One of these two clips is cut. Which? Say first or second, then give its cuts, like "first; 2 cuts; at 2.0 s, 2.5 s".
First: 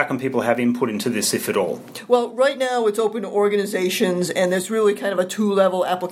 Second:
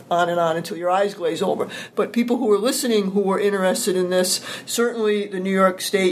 second; 1 cut; at 1.9 s